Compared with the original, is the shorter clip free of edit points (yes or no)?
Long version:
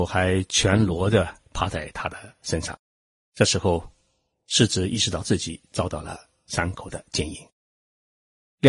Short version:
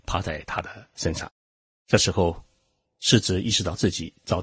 yes